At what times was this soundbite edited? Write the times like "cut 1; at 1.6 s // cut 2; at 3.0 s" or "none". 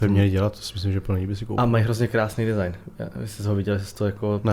none

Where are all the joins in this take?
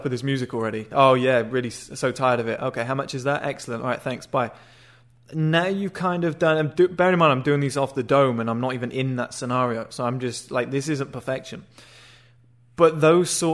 none

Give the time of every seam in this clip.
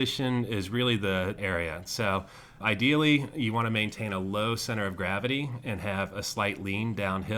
cut 1; at 1.4 s // cut 2; at 2.6 s

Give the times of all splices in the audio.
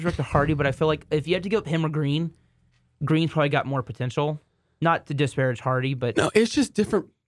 none

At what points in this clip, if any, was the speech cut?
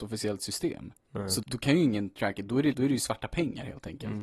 cut 1; at 1.4 s // cut 2; at 2.7 s

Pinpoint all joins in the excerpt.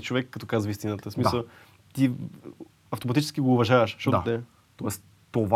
cut 1; at 4.2 s

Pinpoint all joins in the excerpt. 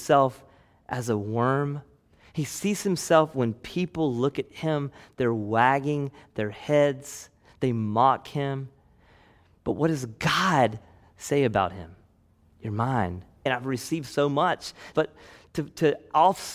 cut 1; at 13.5 s // cut 2; at 14.9 s

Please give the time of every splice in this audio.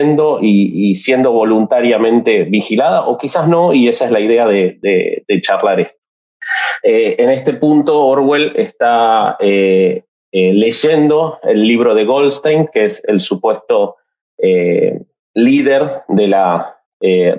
cut 1; at 6.8 s

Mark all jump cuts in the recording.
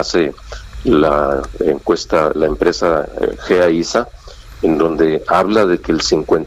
cut 1; at 2.3 s

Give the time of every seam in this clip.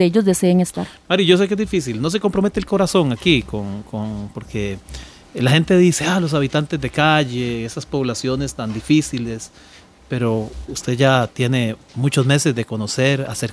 none

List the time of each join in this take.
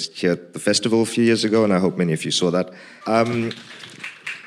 cut 1; at 3.0 s

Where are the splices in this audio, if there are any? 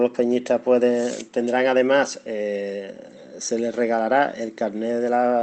none

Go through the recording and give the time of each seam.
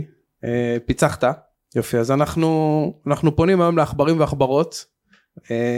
cut 1; at 1.6 s

